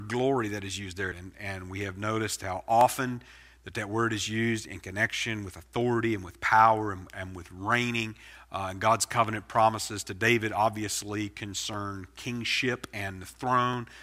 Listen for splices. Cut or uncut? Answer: cut